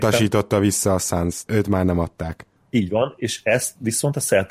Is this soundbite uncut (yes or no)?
no